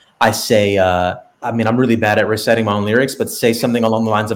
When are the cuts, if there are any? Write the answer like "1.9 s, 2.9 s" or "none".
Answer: 1.4 s